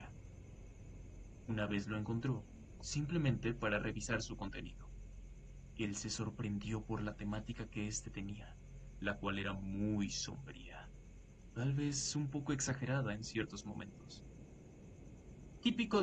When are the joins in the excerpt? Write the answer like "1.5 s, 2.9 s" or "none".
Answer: 2.8 s